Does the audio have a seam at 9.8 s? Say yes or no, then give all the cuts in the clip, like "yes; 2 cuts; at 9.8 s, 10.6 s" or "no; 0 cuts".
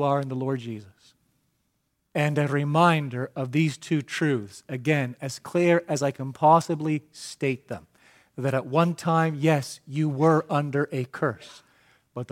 no; 1 cut; at 2.1 s